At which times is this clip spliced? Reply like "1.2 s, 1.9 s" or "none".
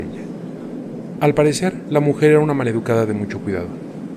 none